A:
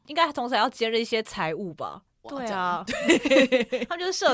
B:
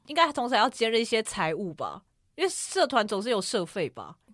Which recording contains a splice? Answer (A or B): A